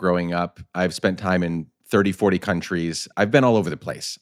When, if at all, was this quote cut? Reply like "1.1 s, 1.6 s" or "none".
3.1 s

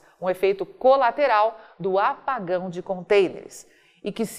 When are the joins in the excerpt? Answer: none

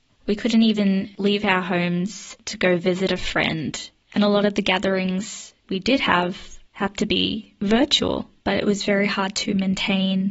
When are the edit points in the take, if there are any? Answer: 4.0 s, 8.4 s

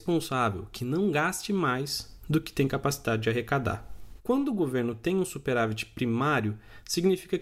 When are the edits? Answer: 4.2 s

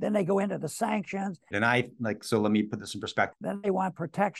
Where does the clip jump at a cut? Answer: 1.5 s, 3.3 s

